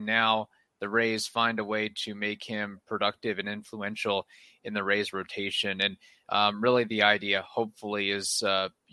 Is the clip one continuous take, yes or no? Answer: yes